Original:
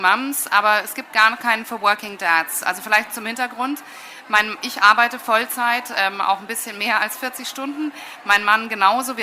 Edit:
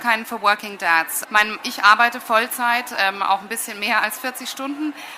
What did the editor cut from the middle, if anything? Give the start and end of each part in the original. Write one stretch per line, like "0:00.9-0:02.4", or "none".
0:02.6-0:04.2